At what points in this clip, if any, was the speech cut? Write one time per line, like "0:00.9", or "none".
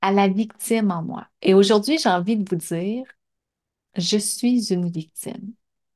0:01.3